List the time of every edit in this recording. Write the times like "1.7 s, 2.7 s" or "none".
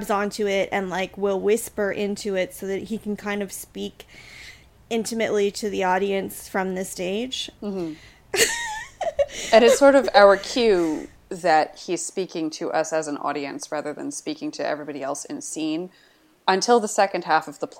none